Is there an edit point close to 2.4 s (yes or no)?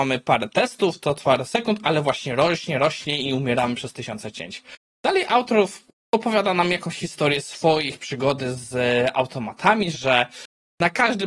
no